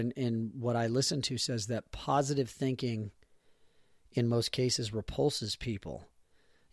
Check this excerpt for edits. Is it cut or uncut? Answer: uncut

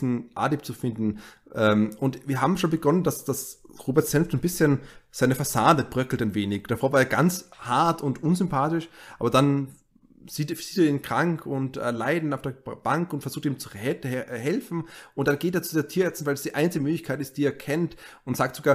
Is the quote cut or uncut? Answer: uncut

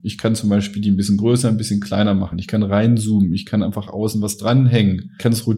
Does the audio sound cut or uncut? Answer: uncut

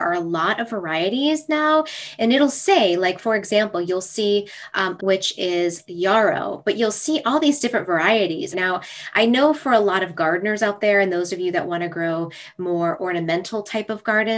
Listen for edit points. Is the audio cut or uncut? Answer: cut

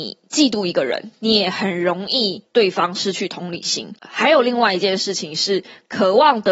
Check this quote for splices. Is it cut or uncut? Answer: cut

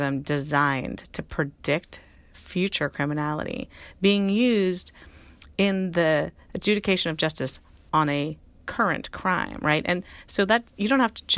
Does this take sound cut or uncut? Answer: uncut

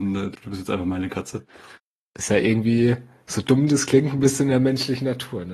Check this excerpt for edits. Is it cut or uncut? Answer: uncut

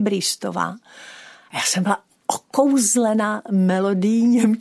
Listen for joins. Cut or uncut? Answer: uncut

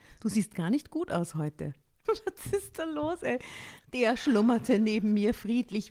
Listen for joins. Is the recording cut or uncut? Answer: cut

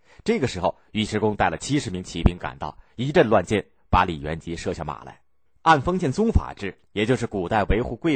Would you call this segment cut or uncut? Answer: cut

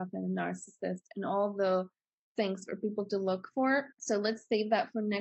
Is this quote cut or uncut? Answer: cut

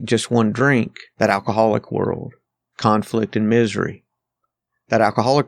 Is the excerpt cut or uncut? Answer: cut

